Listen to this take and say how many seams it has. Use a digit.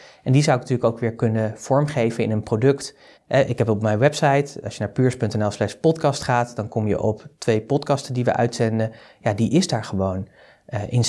1